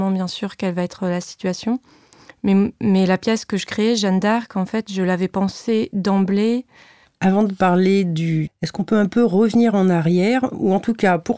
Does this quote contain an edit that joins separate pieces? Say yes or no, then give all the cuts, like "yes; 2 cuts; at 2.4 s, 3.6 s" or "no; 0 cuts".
yes; 2 cuts; at 7.1 s, 8.5 s